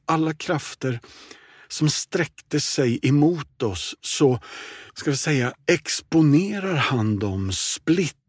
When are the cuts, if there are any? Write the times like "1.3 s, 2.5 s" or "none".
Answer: 4.9 s